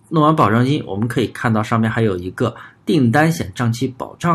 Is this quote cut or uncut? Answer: uncut